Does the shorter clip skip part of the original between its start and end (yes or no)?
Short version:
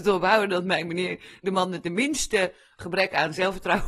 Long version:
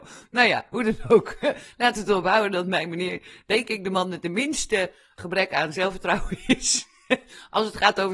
yes